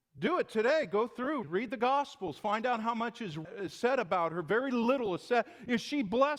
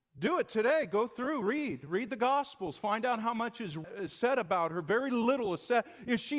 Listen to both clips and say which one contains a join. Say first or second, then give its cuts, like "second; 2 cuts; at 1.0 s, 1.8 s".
first; 1 cut; at 1.4 s